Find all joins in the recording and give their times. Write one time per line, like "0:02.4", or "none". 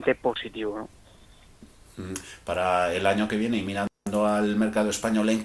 none